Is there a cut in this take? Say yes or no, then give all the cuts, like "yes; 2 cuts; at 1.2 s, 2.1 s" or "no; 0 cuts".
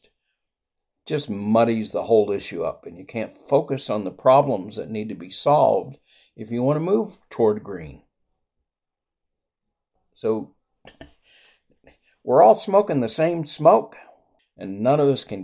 yes; 2 cuts; at 10.0 s, 14.4 s